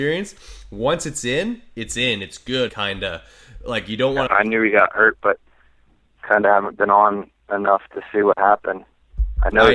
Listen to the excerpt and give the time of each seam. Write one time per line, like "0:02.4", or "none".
0:02.7
0:04.3